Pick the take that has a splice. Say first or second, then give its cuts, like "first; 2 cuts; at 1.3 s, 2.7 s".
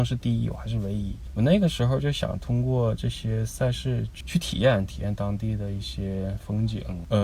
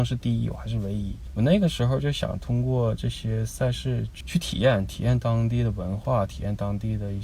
first; 1 cut; at 4.9 s